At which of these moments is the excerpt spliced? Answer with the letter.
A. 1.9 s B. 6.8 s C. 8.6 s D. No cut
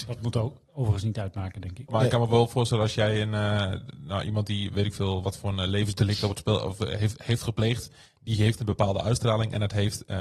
A